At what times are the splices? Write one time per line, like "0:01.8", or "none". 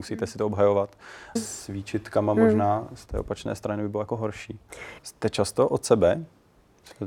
0:01.4
0:05.0